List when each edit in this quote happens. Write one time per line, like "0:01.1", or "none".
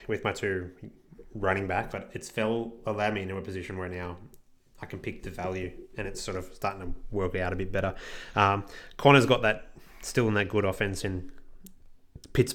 0:01.9